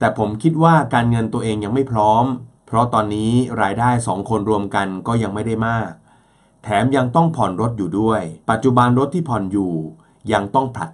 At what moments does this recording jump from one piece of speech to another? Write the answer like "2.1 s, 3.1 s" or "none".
2.6 s, 8.4 s